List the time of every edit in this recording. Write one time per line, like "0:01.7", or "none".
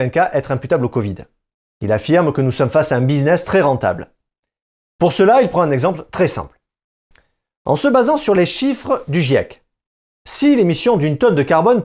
none